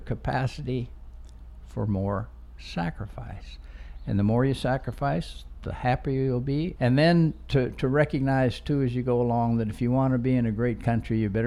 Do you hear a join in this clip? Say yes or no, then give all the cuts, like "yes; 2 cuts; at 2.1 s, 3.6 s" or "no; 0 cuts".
yes; 1 cut; at 6.8 s